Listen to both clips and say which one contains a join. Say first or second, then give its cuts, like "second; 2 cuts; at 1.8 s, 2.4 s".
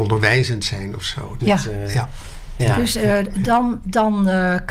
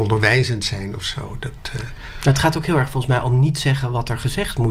first; 1 cut; at 1.4 s